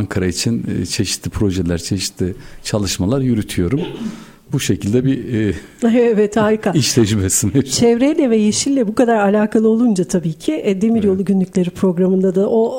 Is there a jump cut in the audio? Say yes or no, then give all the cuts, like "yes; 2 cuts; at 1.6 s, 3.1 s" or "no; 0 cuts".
no; 0 cuts